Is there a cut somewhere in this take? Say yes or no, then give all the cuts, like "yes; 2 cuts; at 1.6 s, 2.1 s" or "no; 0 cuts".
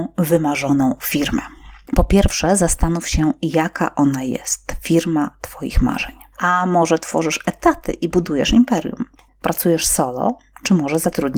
yes; 2 cuts; at 6.3 s, 9.3 s